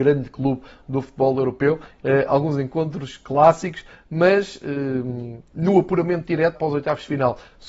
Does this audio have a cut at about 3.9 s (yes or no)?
no